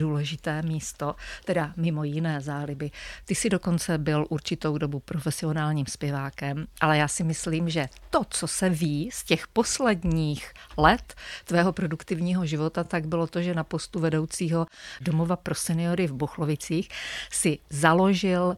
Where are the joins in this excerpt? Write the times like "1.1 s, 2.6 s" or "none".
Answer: none